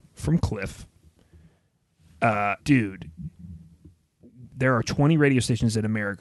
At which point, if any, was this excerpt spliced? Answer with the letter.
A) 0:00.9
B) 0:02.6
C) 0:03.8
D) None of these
B